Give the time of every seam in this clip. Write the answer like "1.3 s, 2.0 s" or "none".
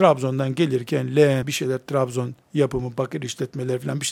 1.4 s

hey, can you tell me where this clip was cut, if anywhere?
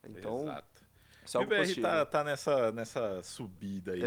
none

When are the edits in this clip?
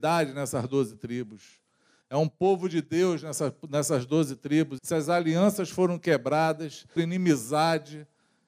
4.8 s, 7.0 s

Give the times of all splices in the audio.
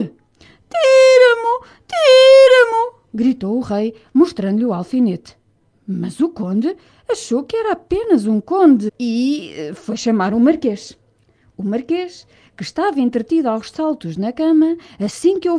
8.9 s

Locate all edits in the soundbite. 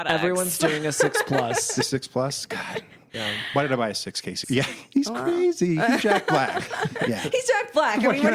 4.4 s

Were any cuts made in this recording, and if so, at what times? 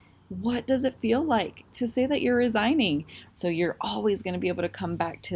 3.3 s

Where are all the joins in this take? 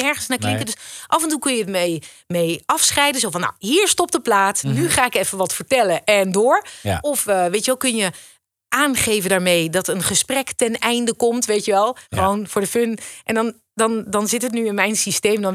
12.0 s

